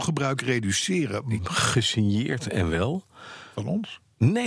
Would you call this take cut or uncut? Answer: cut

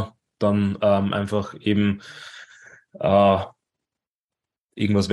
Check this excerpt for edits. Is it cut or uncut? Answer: uncut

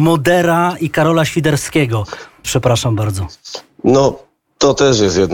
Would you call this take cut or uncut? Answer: cut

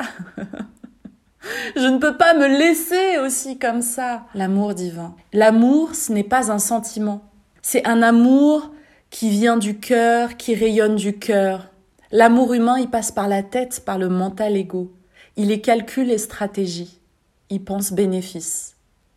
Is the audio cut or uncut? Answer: cut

